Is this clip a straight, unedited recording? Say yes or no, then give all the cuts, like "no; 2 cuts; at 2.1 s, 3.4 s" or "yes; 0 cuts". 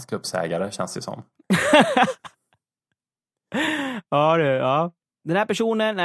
no; 1 cut; at 5.0 s